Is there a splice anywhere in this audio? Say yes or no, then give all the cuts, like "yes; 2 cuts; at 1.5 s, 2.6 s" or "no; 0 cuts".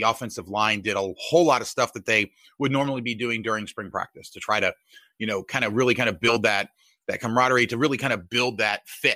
no; 0 cuts